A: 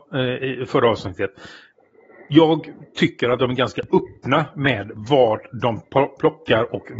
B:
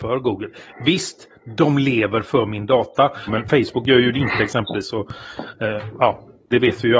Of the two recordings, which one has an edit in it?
B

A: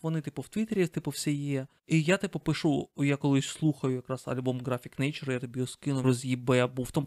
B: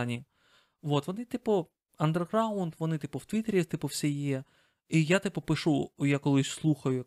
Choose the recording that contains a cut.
A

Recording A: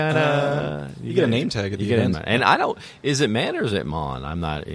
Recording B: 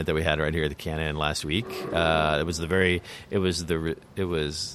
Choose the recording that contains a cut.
A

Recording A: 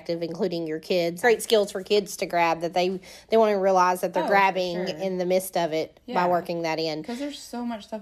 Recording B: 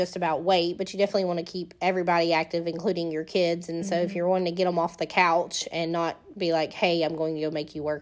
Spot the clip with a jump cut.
A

